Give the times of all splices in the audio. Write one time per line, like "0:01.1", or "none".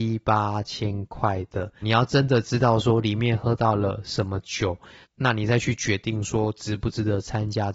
0:01.8
0:05.0